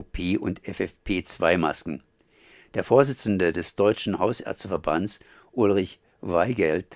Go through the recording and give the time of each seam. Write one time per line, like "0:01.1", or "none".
none